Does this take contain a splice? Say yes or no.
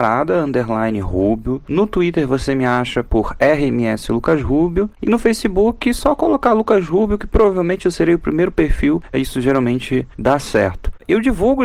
no